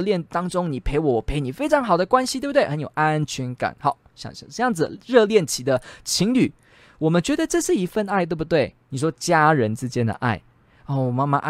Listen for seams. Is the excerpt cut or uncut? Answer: cut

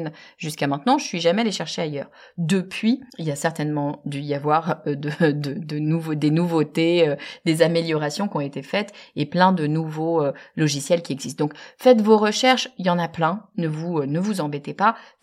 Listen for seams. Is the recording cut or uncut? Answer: cut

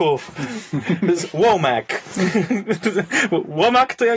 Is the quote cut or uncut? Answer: uncut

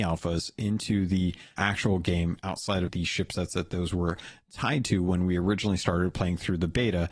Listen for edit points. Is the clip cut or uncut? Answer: cut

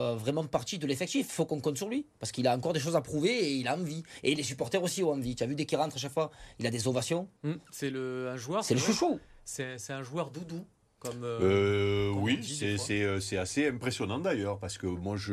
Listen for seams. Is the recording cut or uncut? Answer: cut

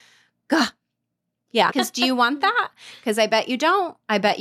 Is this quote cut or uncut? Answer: cut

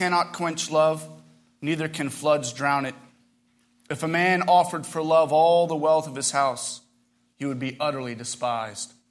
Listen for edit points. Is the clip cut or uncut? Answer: uncut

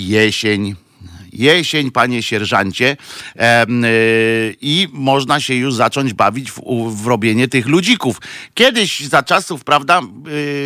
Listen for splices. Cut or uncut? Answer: uncut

